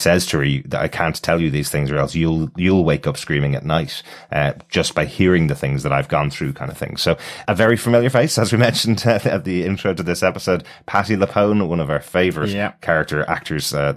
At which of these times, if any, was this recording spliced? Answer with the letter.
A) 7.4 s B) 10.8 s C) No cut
A